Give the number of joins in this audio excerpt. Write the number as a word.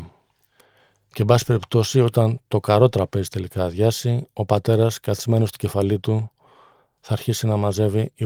zero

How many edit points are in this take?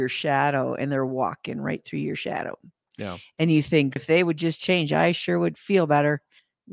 one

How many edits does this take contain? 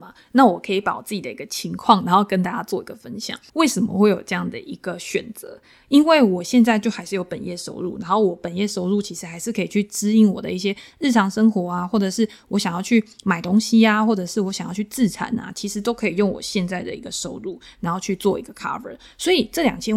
one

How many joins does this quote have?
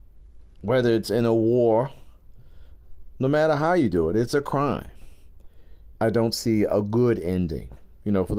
one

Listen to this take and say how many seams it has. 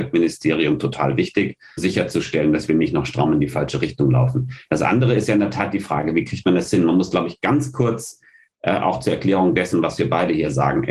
one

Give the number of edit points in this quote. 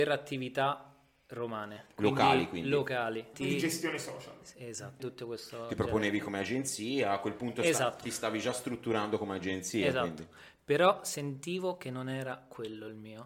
two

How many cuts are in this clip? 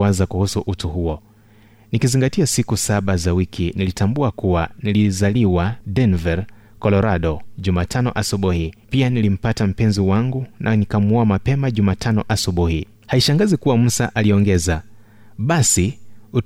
two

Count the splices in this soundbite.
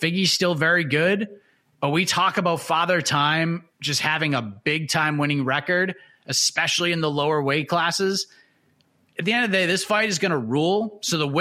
zero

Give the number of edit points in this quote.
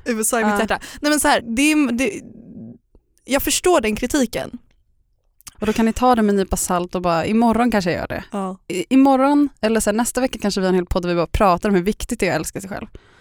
two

